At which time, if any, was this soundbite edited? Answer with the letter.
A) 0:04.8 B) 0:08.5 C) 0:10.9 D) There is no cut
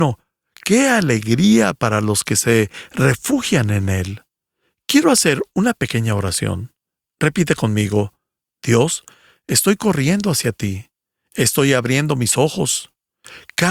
D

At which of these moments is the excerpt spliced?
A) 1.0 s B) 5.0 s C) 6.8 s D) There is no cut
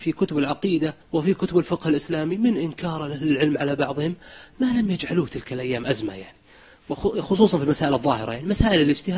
A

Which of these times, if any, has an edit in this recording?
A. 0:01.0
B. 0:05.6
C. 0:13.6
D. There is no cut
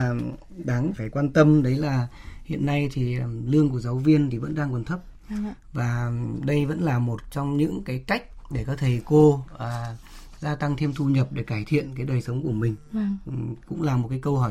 A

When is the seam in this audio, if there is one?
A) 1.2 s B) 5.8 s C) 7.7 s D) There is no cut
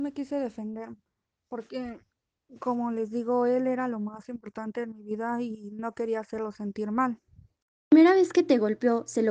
D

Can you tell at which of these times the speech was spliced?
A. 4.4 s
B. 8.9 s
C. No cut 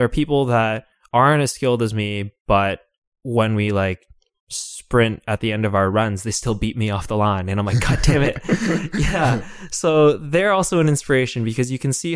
C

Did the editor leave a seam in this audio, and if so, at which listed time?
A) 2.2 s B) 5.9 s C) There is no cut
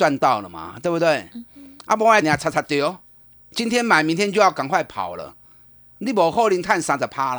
A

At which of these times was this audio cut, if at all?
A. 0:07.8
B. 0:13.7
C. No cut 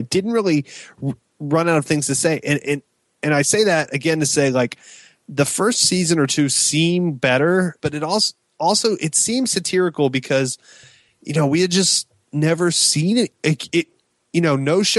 A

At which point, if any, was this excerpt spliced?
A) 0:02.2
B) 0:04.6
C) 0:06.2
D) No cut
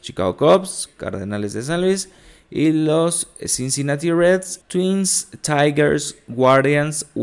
B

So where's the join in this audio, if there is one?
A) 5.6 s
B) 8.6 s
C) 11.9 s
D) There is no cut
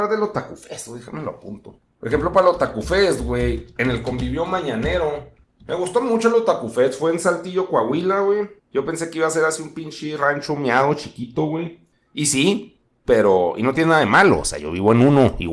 B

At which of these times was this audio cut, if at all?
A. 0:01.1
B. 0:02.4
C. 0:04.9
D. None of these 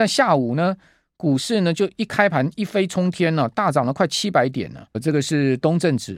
C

